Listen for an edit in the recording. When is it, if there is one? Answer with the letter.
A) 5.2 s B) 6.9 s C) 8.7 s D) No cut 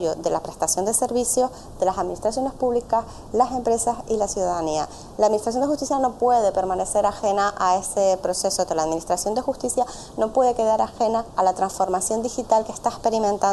C